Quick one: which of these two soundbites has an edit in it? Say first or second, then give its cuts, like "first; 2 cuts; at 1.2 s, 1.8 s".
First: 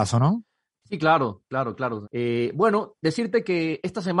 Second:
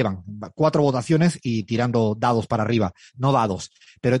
first; 1 cut; at 2.0 s